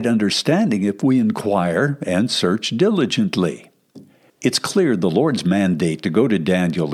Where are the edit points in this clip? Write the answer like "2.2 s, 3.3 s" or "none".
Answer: 4.3 s